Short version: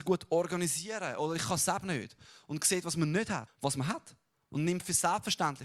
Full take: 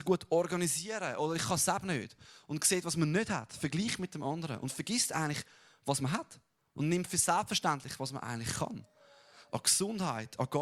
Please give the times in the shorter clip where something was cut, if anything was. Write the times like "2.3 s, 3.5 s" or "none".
3.5 s